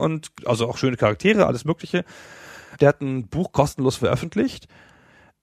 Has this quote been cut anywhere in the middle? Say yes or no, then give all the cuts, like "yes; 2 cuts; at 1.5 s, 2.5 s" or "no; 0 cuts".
yes; 1 cut; at 2.8 s